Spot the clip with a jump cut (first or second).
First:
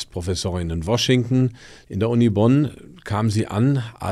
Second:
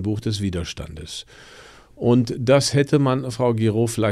first